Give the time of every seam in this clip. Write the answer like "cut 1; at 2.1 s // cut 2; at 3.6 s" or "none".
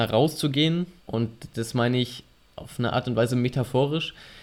cut 1; at 1.0 s